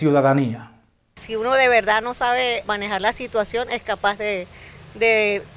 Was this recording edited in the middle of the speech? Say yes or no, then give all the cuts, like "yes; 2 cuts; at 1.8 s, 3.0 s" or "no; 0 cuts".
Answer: yes; 1 cut; at 2.6 s